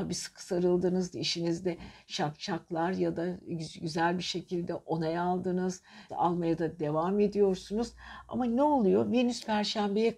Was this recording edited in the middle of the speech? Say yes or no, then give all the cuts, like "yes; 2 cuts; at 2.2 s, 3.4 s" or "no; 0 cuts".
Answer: yes; 2 cuts; at 1.1 s, 6.1 s